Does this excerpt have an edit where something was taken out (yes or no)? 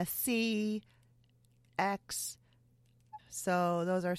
yes